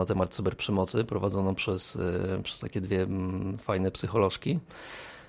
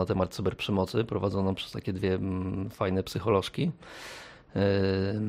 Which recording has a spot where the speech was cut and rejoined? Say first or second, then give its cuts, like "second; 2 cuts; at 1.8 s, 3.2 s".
second; 1 cut; at 1.6 s